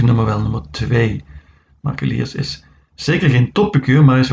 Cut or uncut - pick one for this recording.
cut